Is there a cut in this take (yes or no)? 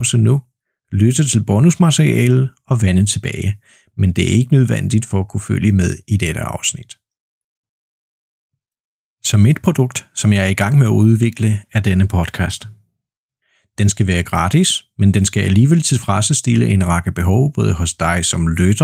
no